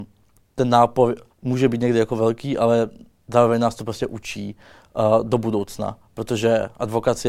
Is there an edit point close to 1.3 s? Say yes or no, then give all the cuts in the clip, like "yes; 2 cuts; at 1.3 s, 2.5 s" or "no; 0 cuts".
yes; 1 cut; at 1.3 s